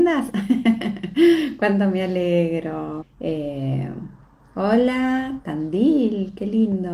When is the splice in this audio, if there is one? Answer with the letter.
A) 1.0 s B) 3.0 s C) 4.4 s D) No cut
B